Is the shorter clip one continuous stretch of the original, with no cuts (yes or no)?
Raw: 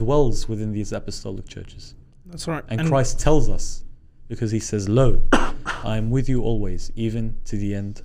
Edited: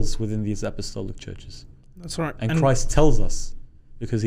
yes